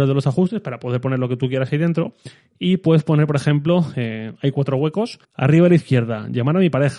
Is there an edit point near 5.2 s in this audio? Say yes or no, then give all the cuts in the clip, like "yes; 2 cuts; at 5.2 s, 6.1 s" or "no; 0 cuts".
yes; 1 cut; at 5.2 s